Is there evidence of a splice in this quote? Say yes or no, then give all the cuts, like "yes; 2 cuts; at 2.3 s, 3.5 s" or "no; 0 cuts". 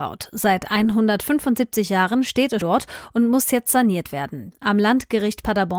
yes; 2 cuts; at 2.6 s, 4.5 s